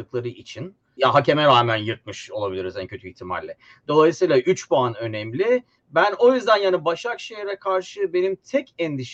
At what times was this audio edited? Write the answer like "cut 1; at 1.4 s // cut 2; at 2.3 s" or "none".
cut 1; at 1.0 s